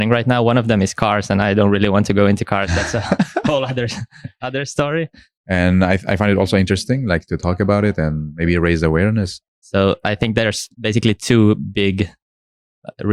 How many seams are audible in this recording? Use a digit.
3